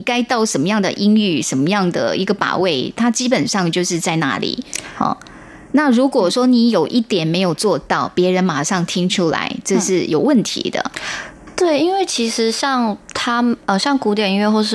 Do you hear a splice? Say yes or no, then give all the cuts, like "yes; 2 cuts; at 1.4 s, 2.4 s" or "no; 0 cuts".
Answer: no; 0 cuts